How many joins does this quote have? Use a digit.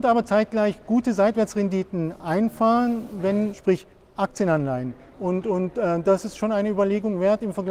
2